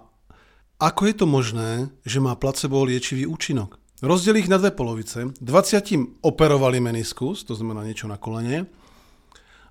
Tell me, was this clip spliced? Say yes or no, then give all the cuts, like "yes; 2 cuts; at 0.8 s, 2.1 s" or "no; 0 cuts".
yes; 1 cut; at 4.0 s